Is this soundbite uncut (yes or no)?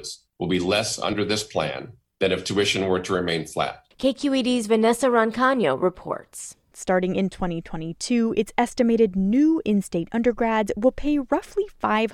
no